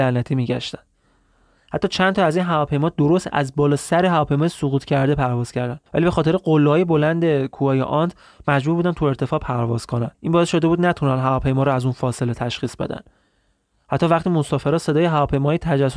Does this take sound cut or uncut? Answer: cut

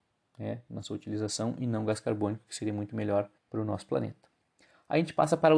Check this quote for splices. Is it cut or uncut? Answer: cut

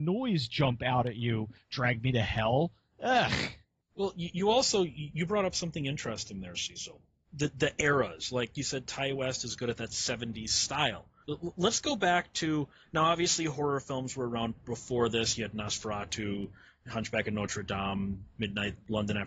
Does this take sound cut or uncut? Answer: uncut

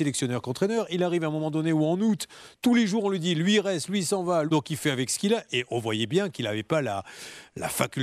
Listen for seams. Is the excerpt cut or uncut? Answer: cut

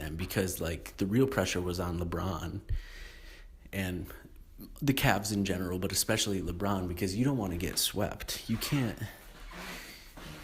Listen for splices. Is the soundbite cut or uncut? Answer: uncut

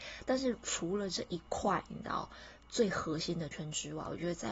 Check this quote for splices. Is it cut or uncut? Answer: cut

